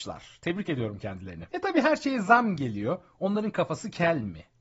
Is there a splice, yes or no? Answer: yes